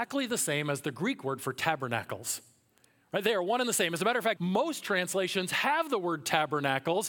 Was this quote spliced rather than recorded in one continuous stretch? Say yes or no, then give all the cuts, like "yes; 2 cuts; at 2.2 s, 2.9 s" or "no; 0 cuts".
yes; 1 cut; at 4.4 s